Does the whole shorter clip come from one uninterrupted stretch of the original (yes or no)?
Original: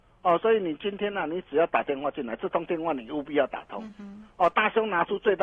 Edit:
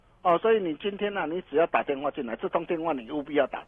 yes